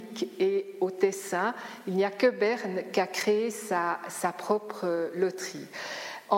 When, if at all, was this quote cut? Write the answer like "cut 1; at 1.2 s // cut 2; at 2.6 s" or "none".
none